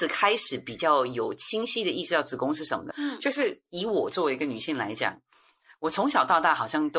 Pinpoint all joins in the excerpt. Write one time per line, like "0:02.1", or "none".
0:02.9